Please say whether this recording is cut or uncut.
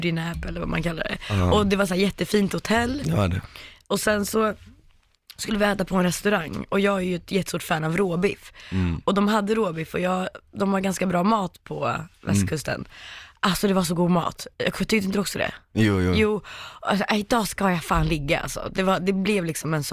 uncut